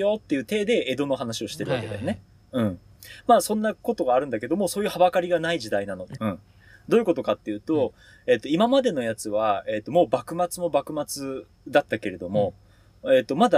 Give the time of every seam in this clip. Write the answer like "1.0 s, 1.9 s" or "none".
6.2 s

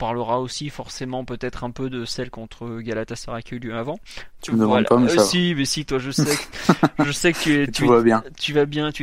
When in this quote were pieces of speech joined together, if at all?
4.4 s

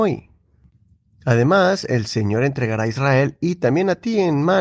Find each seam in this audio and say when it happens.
none

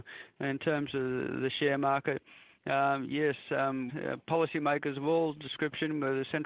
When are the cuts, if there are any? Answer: 3.9 s

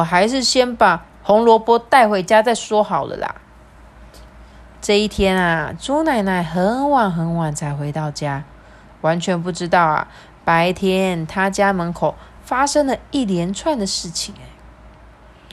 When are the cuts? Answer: none

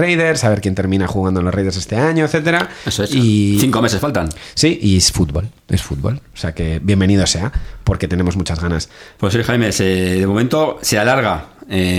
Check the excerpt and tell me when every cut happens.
9.2 s

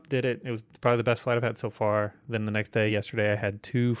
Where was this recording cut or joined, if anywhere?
none

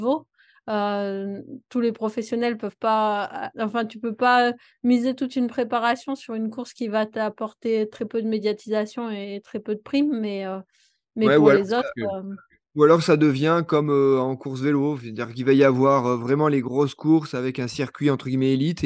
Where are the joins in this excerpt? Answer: 3.5 s

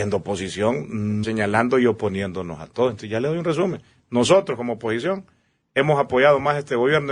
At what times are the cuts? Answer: 1.2 s

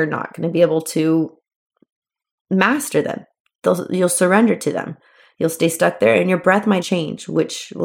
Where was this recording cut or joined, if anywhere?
6.8 s

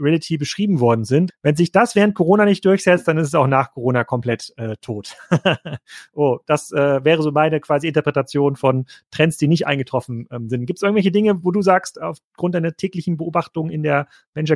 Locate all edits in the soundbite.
1.3 s

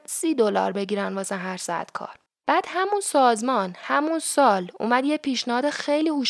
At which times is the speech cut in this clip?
2.3 s

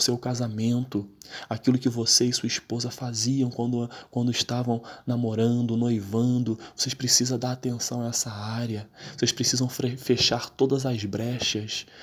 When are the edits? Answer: none

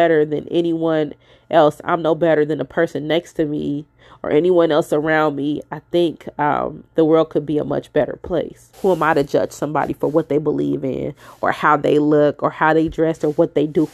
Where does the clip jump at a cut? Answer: 6.9 s, 8.7 s

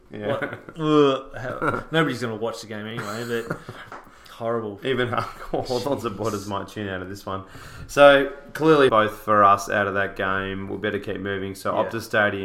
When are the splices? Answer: 8.9 s

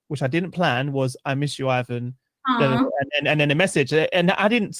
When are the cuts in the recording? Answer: none

